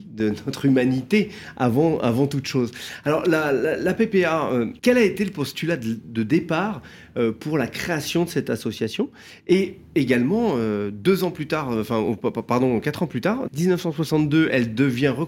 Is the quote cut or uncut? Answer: cut